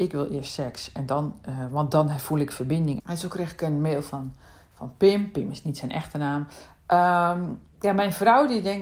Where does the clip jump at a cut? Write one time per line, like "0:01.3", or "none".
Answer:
0:03.0